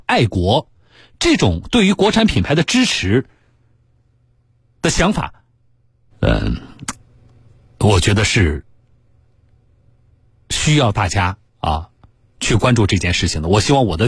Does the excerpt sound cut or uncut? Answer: cut